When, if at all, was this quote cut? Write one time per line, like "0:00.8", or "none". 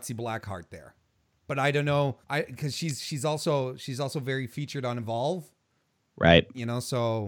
0:02.2